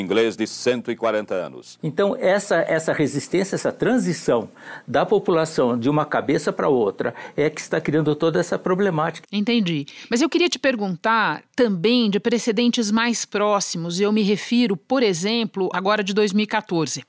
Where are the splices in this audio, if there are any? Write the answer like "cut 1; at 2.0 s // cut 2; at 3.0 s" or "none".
cut 1; at 9.2 s // cut 2; at 15.7 s